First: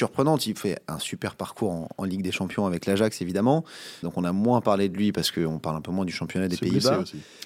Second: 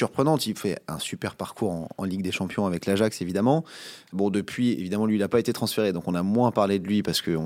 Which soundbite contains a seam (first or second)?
first